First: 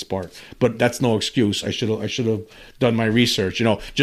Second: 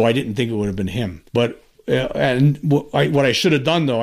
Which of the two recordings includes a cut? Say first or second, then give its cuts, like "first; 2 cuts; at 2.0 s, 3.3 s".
second; 1 cut; at 1.3 s